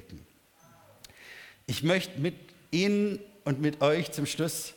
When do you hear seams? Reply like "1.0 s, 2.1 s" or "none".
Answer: none